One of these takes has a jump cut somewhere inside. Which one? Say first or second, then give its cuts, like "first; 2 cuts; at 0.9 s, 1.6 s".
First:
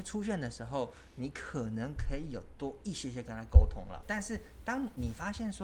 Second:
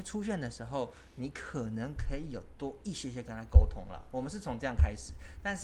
first; 1 cut; at 4.0 s